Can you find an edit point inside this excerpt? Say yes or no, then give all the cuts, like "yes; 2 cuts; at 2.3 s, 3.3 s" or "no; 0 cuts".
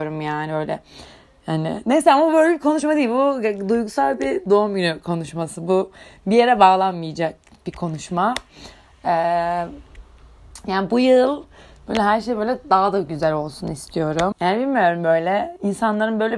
yes; 1 cut; at 14.3 s